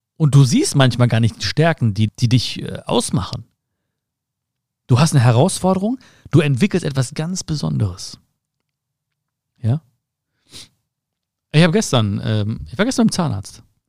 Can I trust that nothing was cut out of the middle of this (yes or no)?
no